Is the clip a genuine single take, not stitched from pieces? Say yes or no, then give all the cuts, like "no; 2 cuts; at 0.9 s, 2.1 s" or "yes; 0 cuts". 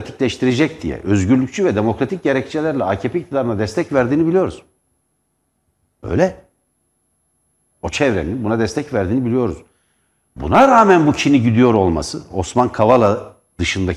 yes; 0 cuts